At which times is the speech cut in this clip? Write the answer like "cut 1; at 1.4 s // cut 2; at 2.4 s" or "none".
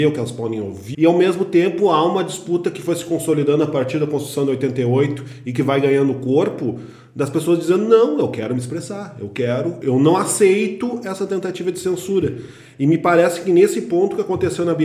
cut 1; at 0.9 s // cut 2; at 9.8 s